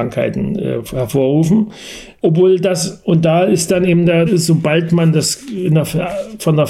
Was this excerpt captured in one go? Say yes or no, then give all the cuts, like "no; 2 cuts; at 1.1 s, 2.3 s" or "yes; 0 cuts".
no; 2 cuts; at 2.2 s, 4.3 s